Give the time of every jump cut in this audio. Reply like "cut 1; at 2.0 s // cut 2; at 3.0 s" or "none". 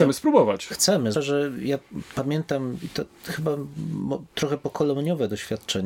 cut 1; at 1.1 s